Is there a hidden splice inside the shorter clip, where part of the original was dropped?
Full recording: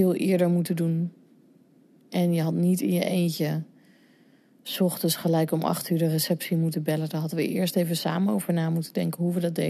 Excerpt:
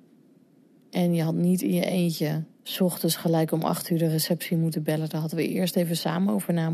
yes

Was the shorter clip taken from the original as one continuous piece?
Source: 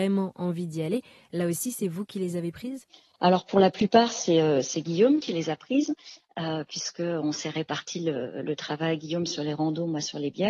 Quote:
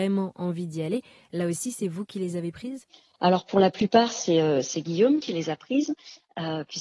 yes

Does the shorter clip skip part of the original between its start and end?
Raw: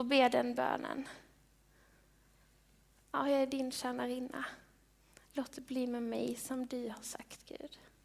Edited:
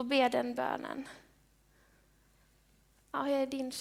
no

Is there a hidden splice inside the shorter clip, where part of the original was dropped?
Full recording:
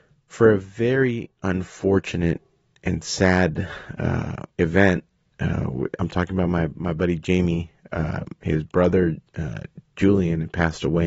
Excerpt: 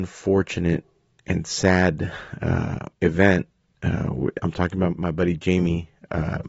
yes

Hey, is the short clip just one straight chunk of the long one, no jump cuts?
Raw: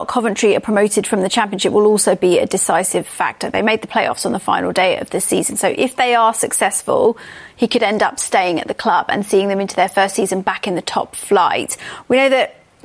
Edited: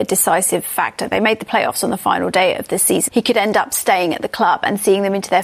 no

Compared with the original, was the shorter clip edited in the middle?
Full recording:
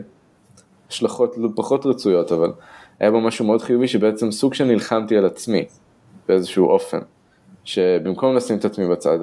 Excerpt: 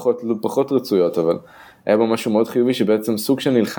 no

